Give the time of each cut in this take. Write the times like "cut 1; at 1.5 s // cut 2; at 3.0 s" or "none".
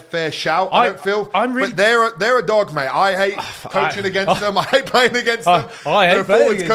none

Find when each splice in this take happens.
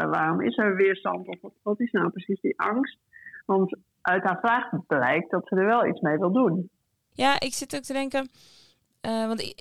cut 1; at 7.1 s

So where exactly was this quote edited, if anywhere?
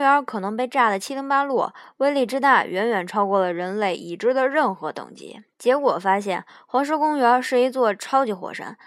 cut 1; at 5.5 s

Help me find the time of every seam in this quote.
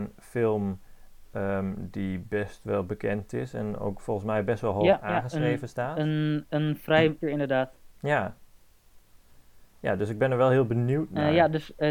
cut 1; at 7.2 s

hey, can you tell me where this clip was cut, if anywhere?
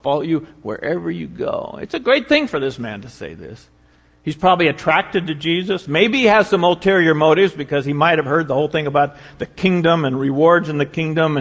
none

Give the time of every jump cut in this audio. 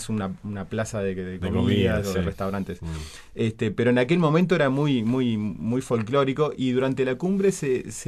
none

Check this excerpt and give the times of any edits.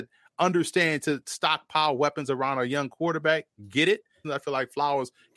cut 1; at 4.2 s

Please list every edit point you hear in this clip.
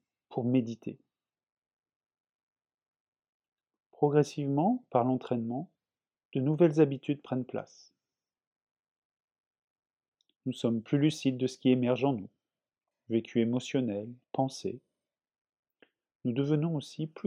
cut 1; at 12.9 s // cut 2; at 14.2 s

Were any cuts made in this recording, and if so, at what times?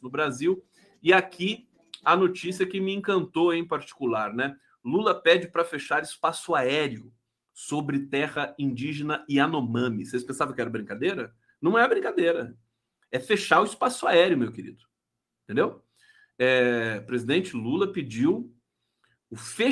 none

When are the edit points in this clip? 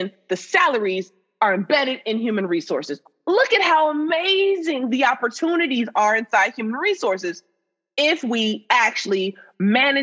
none

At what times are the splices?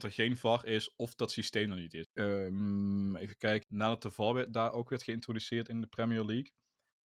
cut 1; at 2.0 s // cut 2; at 3.6 s

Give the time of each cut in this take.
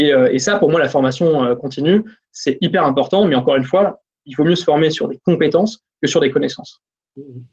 none

